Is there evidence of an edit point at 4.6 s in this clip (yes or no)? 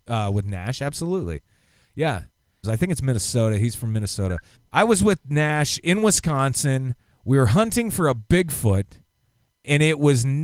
yes